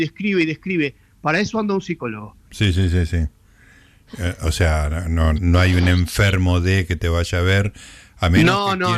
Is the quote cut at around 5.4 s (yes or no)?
yes